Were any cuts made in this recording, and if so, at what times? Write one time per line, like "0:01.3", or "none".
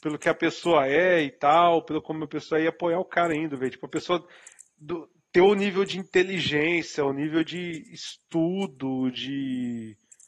none